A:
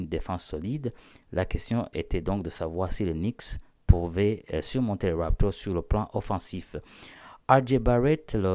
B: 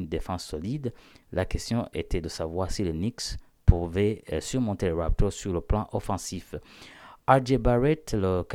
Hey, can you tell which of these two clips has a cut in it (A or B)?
B